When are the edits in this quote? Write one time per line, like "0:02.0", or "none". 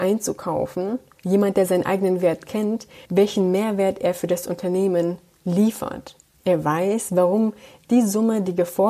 0:01.2
0:03.1